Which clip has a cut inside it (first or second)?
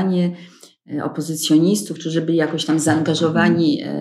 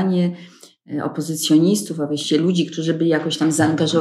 first